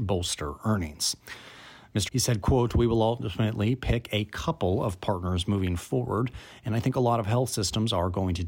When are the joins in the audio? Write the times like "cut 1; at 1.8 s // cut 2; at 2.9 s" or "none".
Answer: cut 1; at 2.1 s